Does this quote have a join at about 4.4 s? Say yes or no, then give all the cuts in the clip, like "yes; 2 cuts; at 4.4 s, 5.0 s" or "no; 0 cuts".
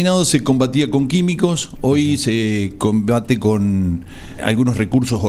yes; 1 cut; at 4.4 s